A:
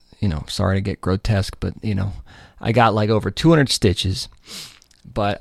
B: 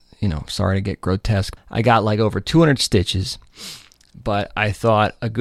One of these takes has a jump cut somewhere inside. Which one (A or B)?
B